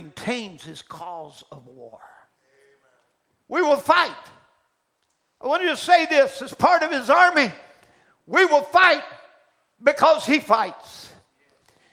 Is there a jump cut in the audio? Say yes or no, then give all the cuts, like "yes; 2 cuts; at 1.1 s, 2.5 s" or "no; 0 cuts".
no; 0 cuts